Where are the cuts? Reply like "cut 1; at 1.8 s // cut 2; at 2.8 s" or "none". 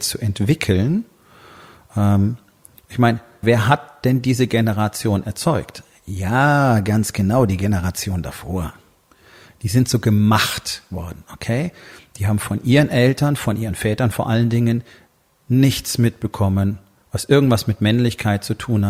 cut 1; at 3.4 s